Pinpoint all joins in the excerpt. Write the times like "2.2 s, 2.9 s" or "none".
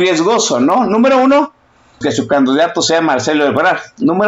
2.0 s